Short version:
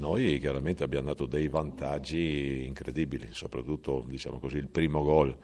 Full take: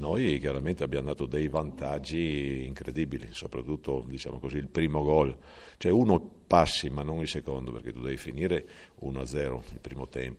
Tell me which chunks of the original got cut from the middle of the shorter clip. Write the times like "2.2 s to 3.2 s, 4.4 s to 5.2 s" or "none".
none